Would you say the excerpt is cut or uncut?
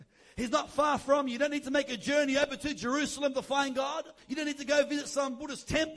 cut